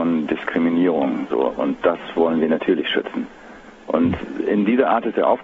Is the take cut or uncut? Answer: uncut